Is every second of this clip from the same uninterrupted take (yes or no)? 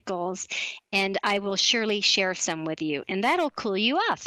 yes